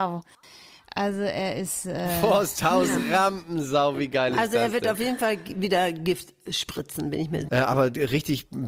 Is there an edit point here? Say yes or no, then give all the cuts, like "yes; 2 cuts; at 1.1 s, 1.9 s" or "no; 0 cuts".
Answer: yes; 1 cut; at 7.5 s